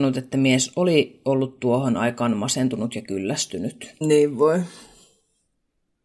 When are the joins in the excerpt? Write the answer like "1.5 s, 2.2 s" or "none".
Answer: 4.0 s